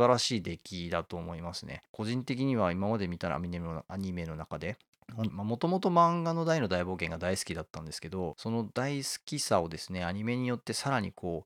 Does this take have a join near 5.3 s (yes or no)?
yes